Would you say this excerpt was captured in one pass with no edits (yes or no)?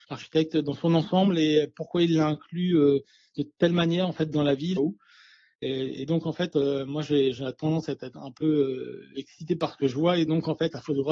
no